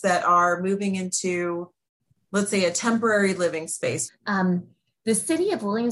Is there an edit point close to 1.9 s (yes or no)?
no